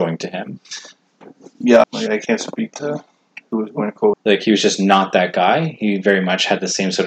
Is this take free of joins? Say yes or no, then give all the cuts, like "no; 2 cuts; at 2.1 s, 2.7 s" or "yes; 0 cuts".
no; 2 cuts; at 1.8 s, 4.1 s